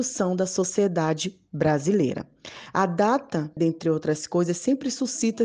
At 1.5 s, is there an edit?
no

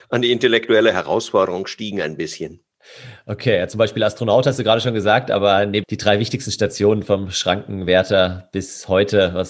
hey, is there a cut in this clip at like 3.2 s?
no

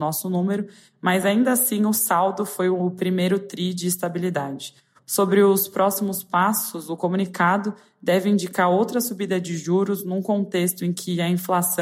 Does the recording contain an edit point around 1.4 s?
no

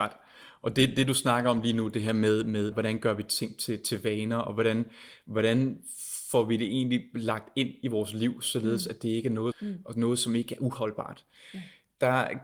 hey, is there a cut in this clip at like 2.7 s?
yes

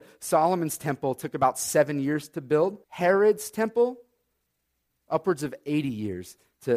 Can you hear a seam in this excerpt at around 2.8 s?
yes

